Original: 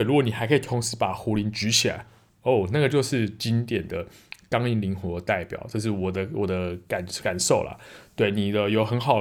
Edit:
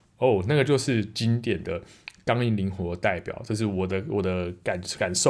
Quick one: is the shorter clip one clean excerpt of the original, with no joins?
yes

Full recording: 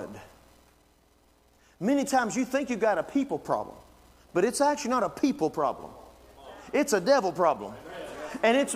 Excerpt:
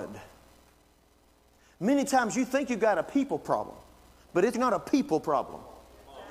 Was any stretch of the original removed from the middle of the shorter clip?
yes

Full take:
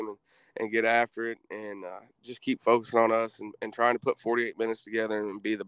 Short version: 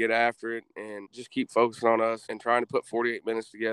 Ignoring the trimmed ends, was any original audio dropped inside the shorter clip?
yes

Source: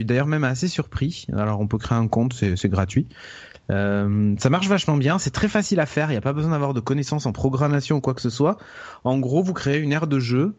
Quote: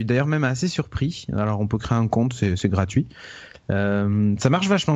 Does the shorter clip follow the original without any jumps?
yes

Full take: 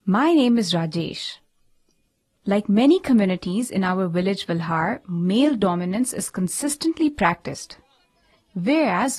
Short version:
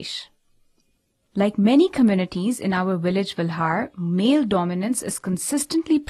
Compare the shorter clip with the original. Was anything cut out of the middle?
no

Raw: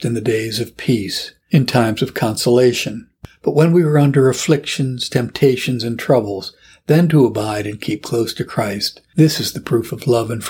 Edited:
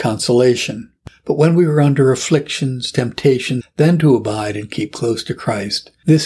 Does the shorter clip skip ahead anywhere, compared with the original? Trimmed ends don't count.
yes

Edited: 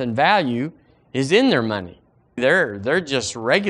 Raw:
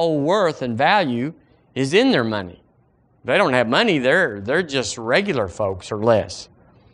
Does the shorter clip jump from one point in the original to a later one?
yes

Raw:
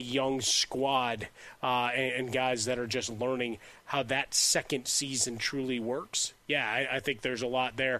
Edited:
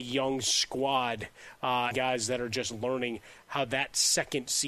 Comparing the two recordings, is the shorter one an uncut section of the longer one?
no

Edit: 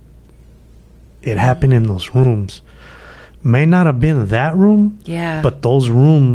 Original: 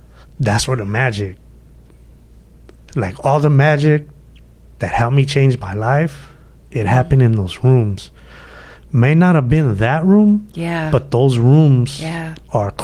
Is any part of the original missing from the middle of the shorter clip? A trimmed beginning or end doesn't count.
yes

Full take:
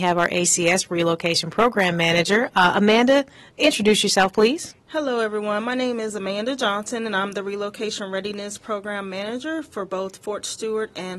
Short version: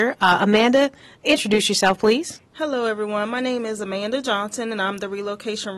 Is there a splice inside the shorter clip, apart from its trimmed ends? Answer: no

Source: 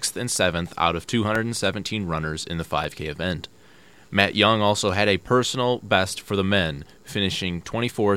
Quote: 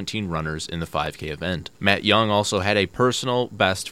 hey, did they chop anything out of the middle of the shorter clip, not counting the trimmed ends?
yes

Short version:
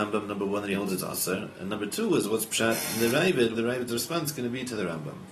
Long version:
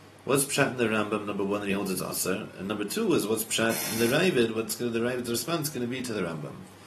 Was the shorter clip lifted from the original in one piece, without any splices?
no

